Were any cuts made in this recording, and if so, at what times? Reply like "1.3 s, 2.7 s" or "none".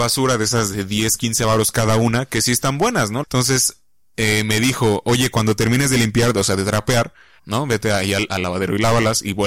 3.2 s, 7.4 s